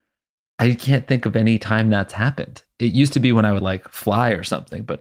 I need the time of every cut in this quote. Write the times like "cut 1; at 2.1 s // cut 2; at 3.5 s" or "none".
none